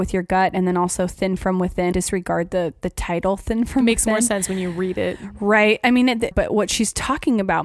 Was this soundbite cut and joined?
yes; 2 cuts; at 1.9 s, 6.3 s

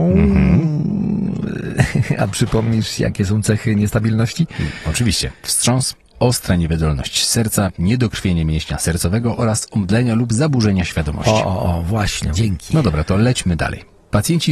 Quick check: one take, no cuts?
no; 1 cut; at 12.3 s

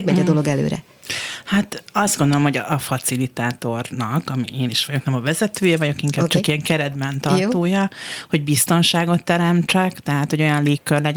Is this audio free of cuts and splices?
yes; 0 cuts

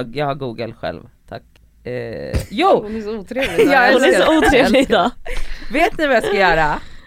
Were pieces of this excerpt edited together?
no; 0 cuts

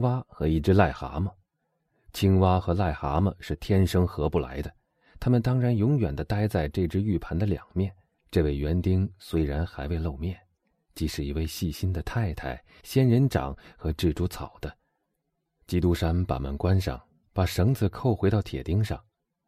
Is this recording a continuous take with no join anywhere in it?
no; 3 cuts; at 8.1 s, 10.7 s, 12.8 s

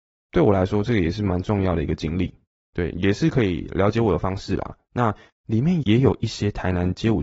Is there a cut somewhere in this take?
yes; 1 cut; at 5.8 s

